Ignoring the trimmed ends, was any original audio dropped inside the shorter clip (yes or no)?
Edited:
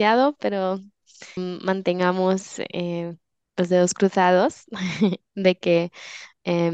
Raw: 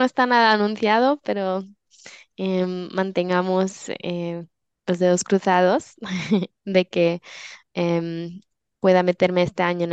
yes